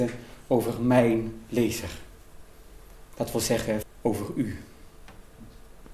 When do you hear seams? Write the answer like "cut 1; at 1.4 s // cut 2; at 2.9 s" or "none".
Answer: cut 1; at 3.8 s

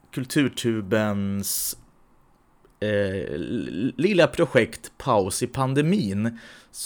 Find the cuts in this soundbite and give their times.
none

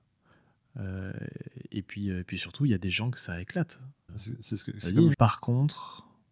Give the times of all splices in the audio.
cut 1; at 4.1 s // cut 2; at 5.1 s

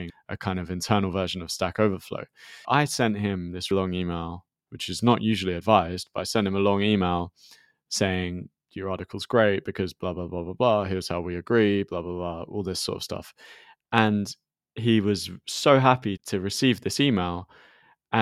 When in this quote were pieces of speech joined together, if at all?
cut 1; at 3.7 s

